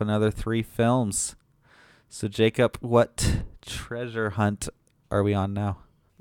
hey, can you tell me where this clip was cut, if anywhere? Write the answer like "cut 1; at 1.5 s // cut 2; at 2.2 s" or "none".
none

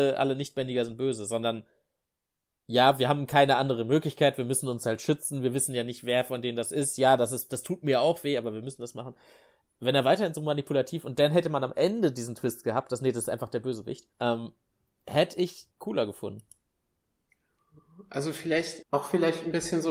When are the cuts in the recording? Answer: cut 1; at 14.1 s // cut 2; at 15.7 s // cut 3; at 18.8 s

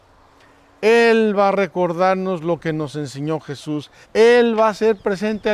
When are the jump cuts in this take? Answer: cut 1; at 4.0 s

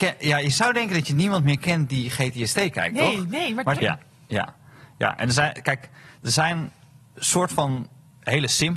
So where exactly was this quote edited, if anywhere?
cut 1; at 3.8 s

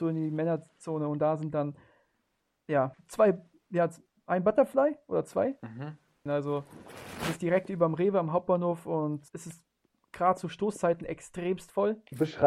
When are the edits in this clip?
cut 1; at 2.9 s // cut 2; at 6.3 s // cut 3; at 9.3 s

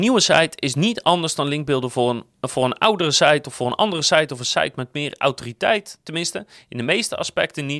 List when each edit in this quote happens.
none

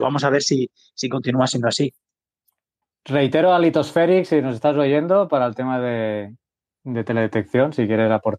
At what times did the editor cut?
cut 1; at 2.8 s

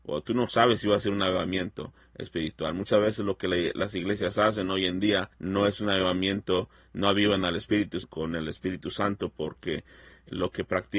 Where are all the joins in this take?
cut 1; at 5.3 s // cut 2; at 8.0 s

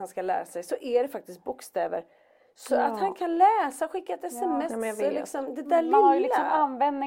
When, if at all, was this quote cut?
none

